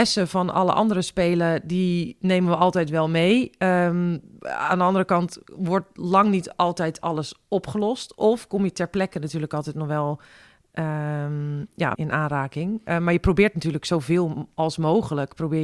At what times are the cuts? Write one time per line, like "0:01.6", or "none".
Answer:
0:11.9

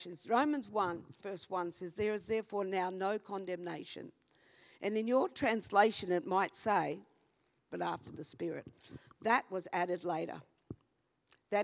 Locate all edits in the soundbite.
0:01.2
0:07.7

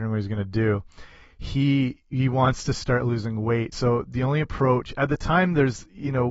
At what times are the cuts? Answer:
none

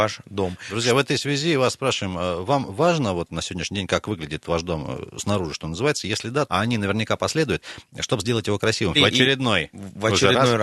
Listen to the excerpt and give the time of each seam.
0:06.5
0:08.9

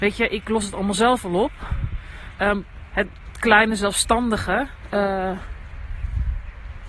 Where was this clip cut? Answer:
0:02.4
0:04.9

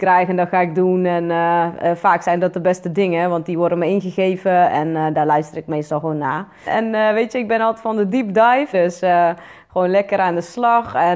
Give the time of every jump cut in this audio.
0:06.7
0:08.7

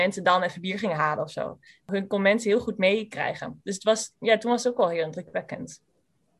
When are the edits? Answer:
none

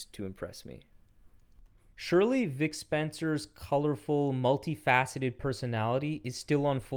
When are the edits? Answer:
0:01.9

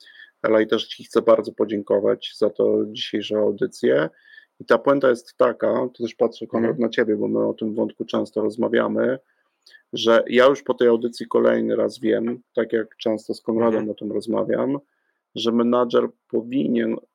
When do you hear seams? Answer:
none

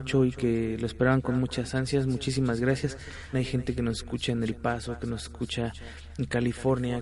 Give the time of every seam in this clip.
0:03.3

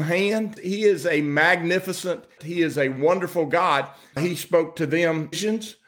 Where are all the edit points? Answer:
0:02.4
0:04.1

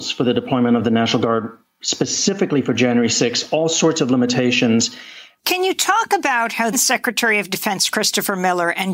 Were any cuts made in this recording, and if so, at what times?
0:05.4
0:06.7

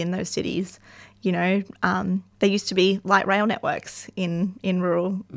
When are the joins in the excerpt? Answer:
0:02.3

